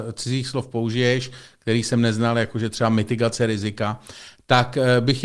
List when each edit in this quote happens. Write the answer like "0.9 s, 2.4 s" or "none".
none